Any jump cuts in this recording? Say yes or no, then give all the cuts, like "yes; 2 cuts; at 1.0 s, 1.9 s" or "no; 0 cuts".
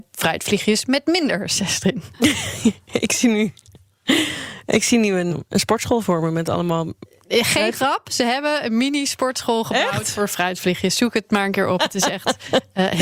yes; 1 cut; at 5.3 s